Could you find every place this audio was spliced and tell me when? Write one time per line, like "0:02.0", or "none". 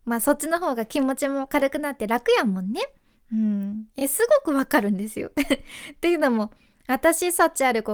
none

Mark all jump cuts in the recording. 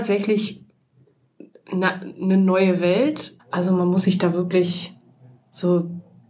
0:03.4

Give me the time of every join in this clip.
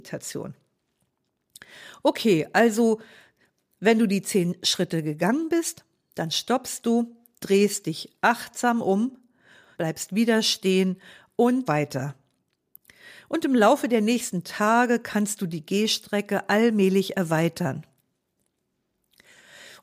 0:09.7
0:11.7

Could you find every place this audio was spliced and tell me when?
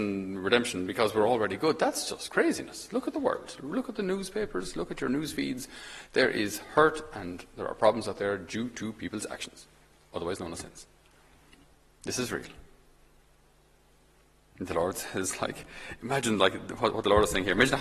0:16.0

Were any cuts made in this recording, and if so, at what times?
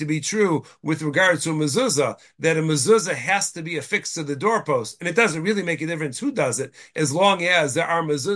none

